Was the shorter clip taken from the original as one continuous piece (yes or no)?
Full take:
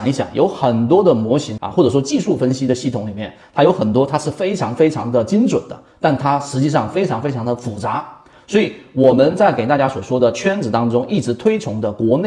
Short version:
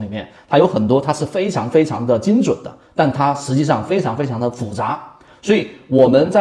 yes